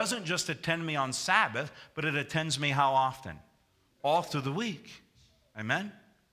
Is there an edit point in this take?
no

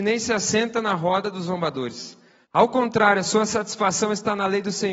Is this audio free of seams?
no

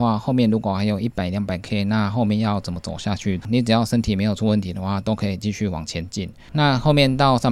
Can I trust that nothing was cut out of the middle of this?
no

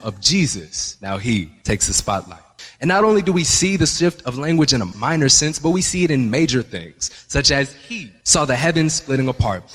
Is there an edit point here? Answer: no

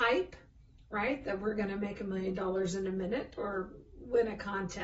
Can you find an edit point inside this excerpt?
no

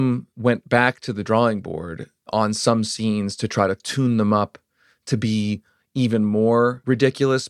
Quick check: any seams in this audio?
no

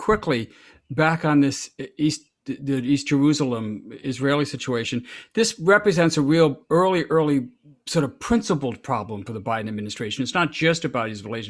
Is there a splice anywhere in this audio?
no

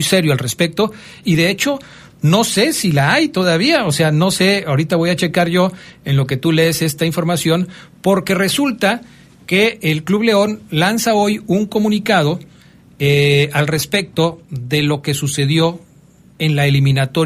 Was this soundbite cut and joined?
yes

